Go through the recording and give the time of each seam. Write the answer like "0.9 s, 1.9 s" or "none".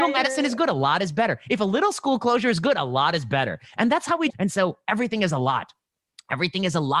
4.3 s